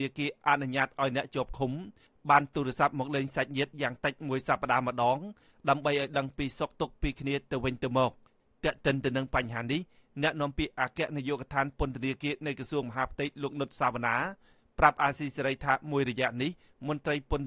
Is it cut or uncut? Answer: uncut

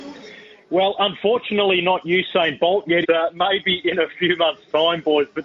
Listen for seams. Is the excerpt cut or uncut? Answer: cut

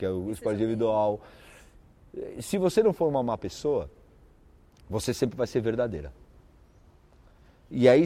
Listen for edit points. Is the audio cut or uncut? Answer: uncut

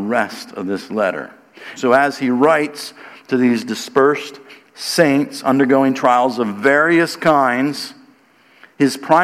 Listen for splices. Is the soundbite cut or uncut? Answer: cut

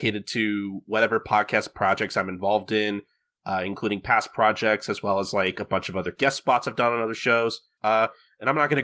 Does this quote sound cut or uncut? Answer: cut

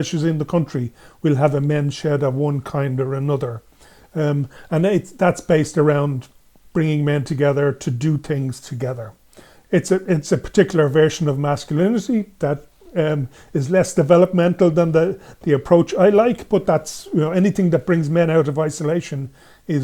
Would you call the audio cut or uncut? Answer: uncut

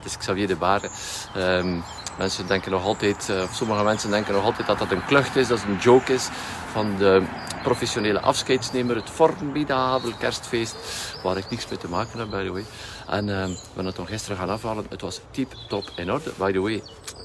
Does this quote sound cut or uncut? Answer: uncut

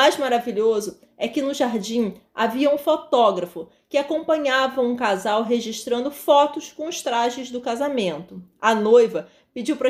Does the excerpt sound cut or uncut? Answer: uncut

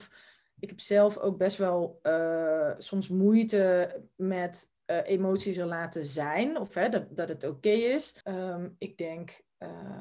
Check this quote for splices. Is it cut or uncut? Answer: cut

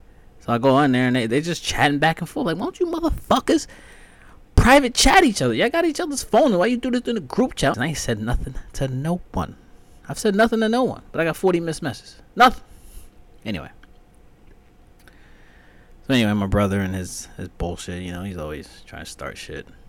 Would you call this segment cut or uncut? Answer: cut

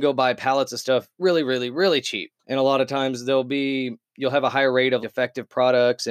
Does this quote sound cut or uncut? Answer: cut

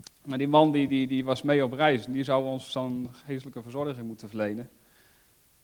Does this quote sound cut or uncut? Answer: uncut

